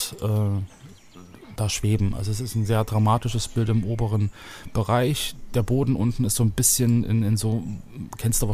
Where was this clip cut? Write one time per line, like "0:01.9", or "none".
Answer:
0:01.6